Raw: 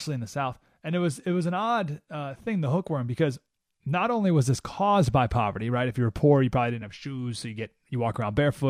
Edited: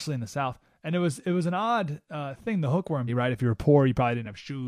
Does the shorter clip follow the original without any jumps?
no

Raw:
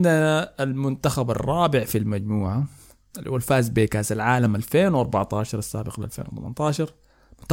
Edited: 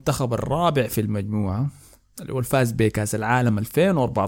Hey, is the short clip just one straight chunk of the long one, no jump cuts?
yes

